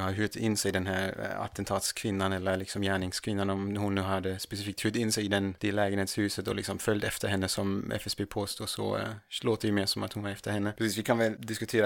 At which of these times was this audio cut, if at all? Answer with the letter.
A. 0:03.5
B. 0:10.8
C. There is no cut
C